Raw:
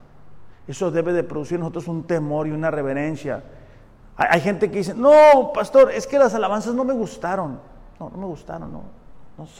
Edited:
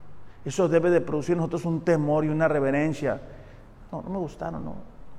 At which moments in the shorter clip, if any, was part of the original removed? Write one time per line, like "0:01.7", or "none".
0:03.9